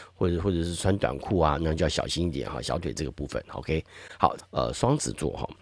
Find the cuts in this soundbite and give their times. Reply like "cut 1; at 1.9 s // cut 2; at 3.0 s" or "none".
cut 1; at 4.4 s